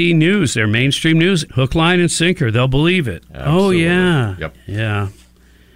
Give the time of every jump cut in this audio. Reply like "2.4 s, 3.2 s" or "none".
1.5 s